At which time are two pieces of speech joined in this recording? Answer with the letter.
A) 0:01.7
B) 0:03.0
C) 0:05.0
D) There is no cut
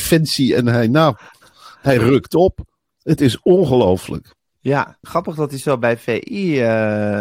C